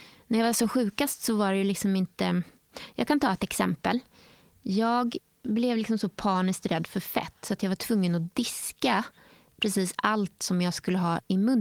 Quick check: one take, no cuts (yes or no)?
yes